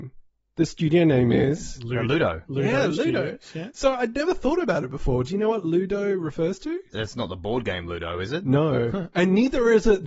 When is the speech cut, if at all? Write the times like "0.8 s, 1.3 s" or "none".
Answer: none